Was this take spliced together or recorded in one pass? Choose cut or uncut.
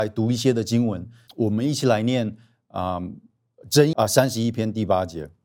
cut